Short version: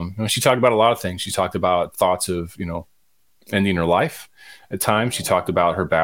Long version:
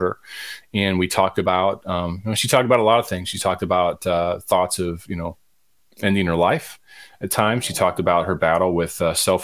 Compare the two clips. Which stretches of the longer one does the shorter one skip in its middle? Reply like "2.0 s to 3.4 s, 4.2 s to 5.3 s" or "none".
4.0 s to 4.4 s